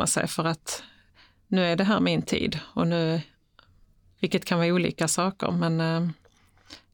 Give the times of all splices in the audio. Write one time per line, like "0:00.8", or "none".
0:04.2